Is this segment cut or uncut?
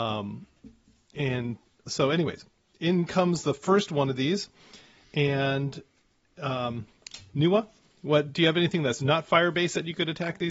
uncut